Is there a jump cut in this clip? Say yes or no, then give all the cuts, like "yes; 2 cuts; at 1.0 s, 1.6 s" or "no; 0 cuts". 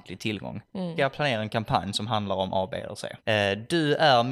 yes; 2 cuts; at 1.0 s, 3.2 s